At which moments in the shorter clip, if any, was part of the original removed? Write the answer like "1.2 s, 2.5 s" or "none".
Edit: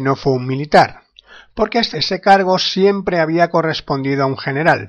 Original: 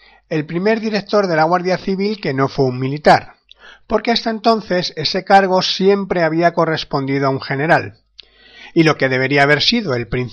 1.9 s